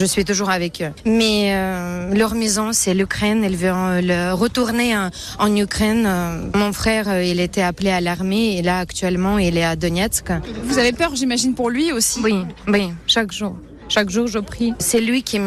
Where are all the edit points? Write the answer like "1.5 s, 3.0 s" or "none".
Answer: none